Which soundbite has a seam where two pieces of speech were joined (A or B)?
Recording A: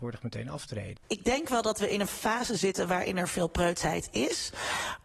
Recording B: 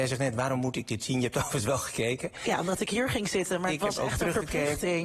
A